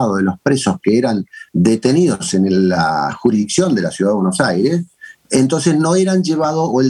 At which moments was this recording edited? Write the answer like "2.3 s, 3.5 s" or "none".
5.2 s